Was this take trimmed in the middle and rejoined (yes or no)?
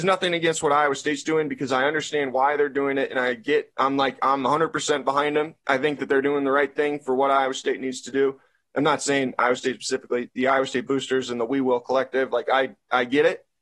no